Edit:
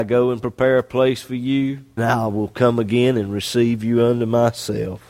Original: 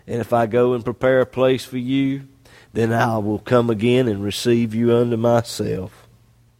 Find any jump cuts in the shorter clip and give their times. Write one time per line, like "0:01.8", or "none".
0:02.0